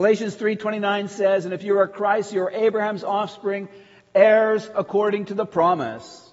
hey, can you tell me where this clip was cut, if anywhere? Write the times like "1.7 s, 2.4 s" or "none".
none